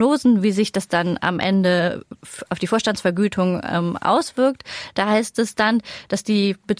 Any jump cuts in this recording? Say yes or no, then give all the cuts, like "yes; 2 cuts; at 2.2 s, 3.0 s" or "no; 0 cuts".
no; 0 cuts